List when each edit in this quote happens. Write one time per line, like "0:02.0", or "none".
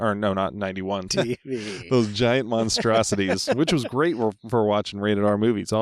0:01.1